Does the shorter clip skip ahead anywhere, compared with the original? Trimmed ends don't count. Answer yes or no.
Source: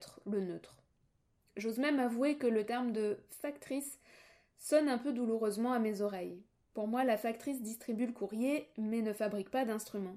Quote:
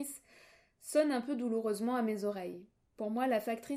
no